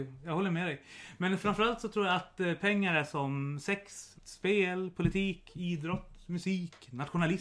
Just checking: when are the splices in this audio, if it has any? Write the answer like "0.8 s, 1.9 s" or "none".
4.1 s